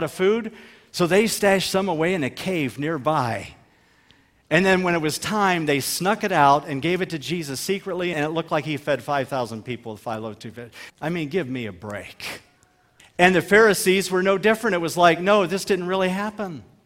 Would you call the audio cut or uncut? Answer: cut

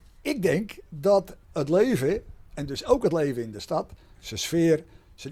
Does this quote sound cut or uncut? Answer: cut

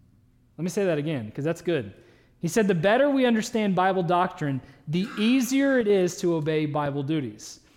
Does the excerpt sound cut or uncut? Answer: uncut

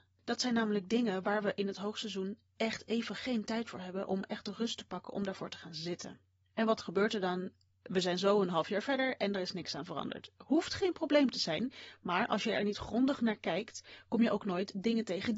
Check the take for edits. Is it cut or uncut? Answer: uncut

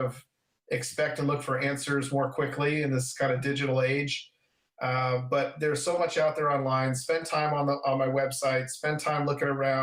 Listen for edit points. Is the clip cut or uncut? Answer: uncut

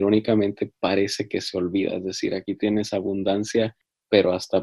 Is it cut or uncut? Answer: uncut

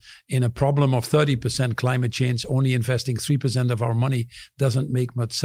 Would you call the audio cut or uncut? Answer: uncut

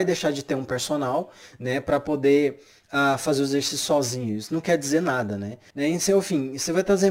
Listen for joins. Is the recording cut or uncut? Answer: cut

